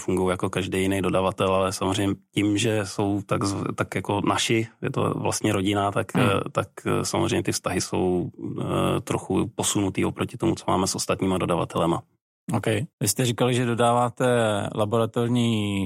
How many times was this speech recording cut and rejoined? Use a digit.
1